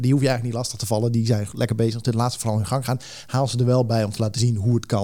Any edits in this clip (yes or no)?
no